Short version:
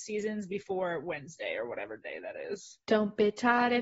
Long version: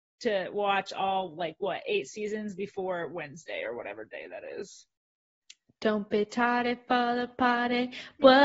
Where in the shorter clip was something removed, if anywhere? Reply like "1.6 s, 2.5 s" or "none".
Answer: 2.8 s